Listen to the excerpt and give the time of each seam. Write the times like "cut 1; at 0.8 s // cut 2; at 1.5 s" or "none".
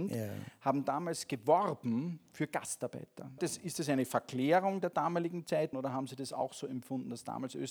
cut 1; at 3.4 s // cut 2; at 5.7 s